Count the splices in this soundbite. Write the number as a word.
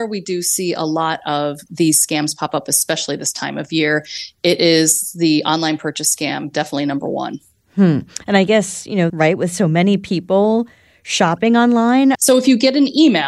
two